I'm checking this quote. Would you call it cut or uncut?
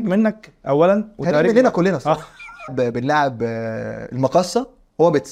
cut